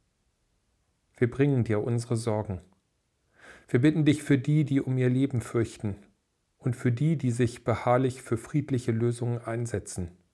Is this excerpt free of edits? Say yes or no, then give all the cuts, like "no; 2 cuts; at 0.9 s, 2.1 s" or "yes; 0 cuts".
yes; 0 cuts